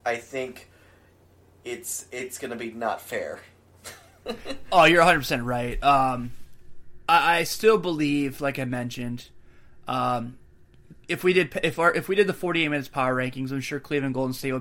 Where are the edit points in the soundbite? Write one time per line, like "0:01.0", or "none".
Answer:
none